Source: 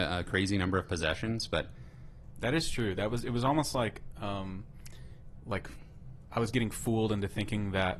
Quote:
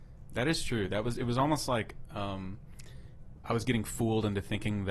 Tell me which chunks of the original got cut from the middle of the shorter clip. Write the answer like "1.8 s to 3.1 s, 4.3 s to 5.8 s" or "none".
5.4 s to 6.2 s